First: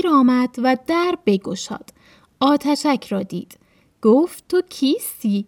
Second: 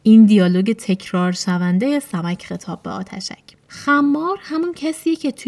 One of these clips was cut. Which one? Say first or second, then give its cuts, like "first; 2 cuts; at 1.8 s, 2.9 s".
second; 1 cut; at 3.6 s